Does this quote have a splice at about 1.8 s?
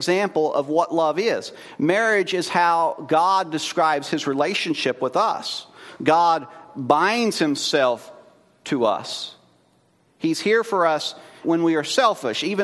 no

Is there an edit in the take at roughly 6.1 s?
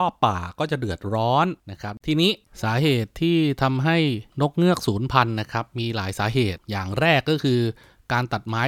no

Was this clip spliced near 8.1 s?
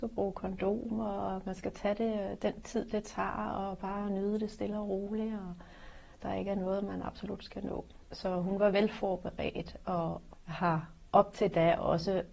no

